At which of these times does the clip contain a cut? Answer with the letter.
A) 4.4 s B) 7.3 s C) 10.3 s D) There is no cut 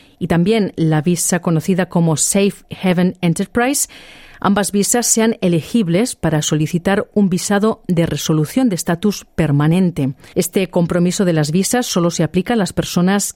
C